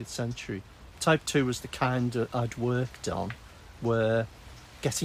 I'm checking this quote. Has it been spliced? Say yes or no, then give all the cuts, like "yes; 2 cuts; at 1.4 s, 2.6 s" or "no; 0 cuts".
yes; 1 cut; at 0.9 s